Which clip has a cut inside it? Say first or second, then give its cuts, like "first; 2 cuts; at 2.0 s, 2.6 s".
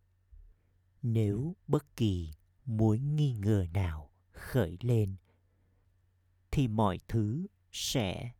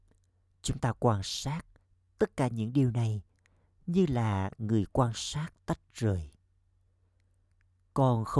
first; 1 cut; at 1.6 s